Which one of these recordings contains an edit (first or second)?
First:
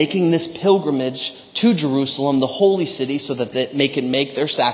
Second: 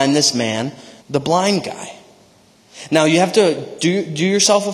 second